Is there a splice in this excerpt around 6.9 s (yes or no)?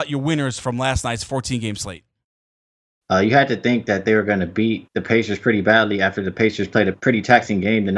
yes